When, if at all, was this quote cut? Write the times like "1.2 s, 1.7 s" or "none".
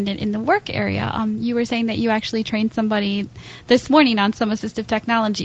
none